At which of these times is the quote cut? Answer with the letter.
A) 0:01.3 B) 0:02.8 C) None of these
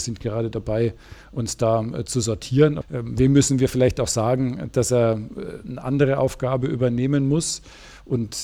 B